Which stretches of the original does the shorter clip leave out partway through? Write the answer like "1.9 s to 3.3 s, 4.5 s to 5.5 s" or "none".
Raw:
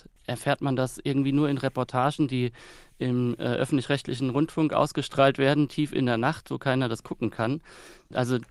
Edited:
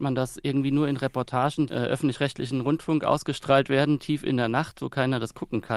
2.3 s to 3.4 s